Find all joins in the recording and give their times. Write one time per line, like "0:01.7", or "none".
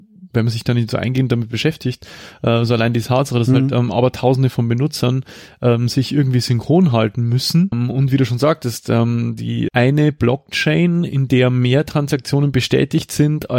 0:07.7
0:09.7